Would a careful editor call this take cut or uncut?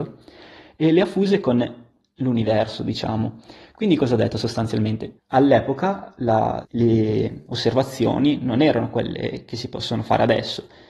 cut